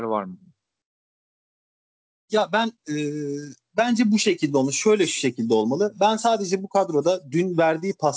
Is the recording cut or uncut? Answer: uncut